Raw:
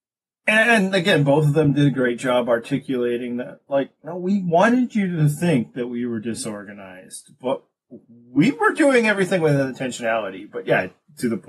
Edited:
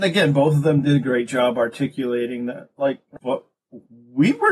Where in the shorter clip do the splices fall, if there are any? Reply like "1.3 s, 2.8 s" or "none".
3.2 s